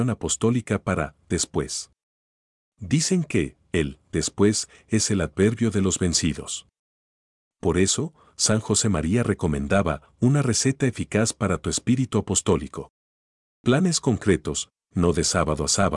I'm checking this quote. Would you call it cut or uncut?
uncut